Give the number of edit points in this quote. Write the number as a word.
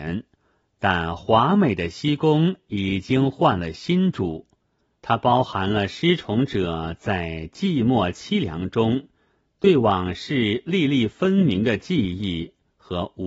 one